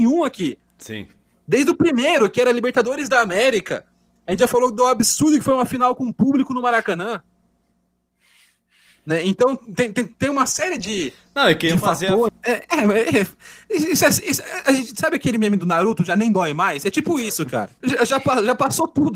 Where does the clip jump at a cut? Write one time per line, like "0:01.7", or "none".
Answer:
0:12.3
0:17.8